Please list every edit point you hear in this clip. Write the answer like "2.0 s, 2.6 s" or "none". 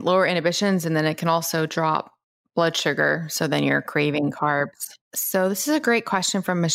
5.0 s